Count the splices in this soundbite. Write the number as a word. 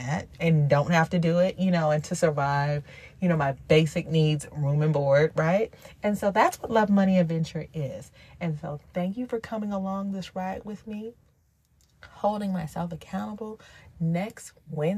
zero